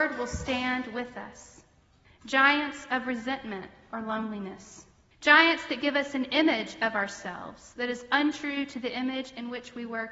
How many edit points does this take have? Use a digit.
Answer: 2